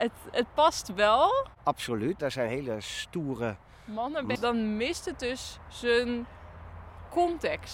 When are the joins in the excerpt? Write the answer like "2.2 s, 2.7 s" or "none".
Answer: 2.2 s, 4.4 s

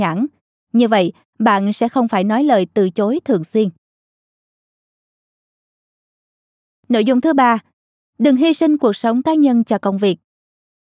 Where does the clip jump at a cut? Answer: none

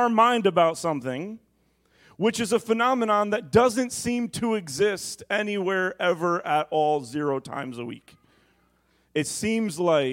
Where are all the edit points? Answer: none

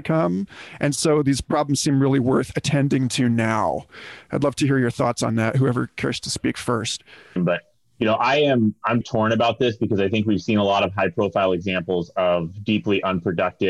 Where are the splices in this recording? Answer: 7.4 s, 9.0 s

